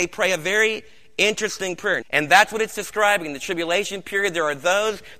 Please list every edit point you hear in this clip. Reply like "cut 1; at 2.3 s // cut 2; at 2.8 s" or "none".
cut 1; at 2.0 s